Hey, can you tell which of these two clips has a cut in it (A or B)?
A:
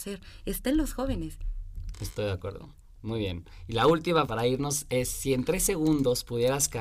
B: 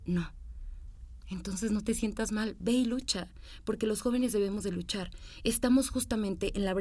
A